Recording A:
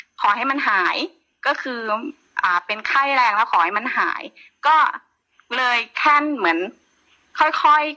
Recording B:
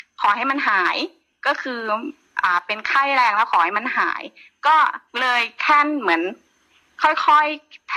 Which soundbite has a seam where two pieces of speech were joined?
B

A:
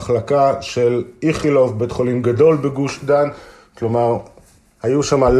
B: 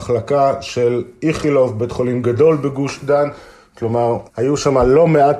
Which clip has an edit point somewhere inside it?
B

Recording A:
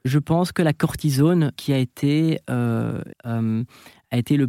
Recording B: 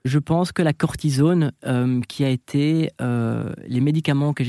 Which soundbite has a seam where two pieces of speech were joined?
A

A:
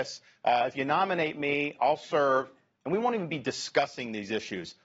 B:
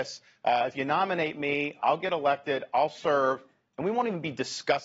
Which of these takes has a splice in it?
A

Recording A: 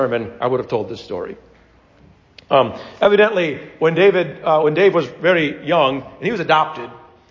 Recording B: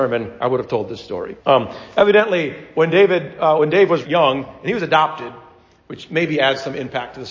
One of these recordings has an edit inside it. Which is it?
B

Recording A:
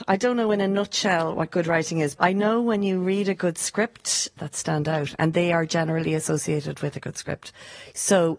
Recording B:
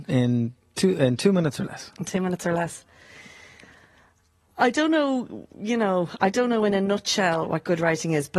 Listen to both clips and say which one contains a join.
A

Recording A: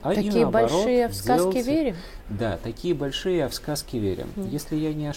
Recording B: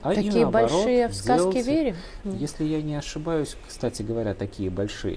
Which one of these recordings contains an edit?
B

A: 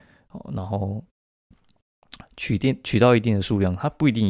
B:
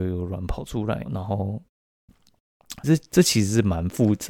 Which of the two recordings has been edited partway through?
B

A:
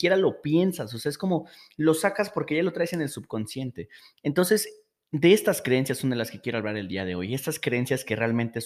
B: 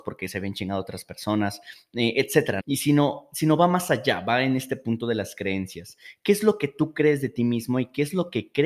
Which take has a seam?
B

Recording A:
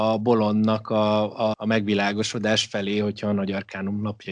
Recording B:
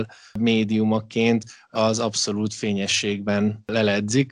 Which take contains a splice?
A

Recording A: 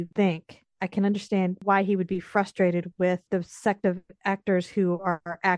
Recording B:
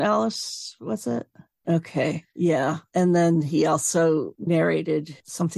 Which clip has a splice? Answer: B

